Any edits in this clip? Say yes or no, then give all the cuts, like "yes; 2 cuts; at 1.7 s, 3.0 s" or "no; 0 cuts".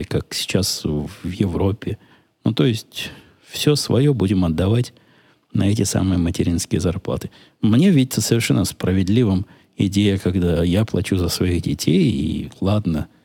no; 0 cuts